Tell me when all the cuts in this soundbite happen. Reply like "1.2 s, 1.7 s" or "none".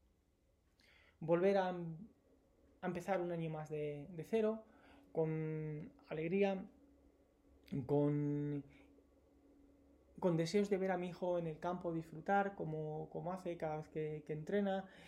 none